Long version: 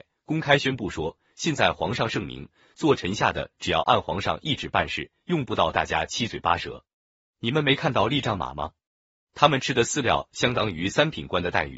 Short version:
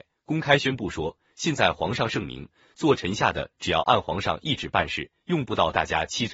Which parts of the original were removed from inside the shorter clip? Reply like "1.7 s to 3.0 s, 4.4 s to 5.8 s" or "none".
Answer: none